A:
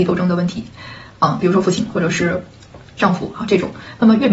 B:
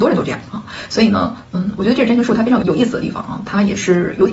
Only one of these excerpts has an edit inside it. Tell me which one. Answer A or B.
B